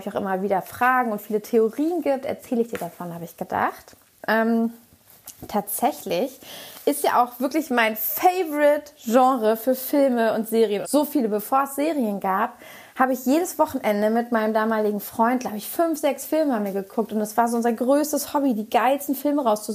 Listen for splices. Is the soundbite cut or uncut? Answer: cut